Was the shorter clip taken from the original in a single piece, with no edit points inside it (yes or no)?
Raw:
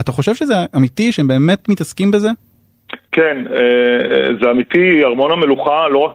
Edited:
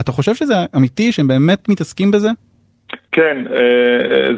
yes